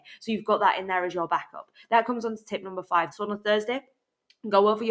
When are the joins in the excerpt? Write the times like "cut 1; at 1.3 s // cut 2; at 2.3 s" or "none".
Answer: cut 1; at 3.1 s